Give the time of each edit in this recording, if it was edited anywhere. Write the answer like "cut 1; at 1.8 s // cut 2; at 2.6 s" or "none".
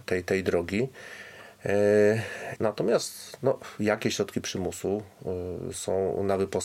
cut 1; at 2.6 s // cut 2; at 5.7 s